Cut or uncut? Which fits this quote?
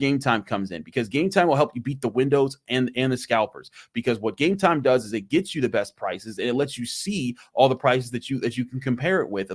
uncut